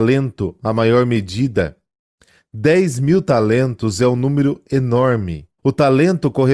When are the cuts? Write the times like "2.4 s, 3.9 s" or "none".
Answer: 5.6 s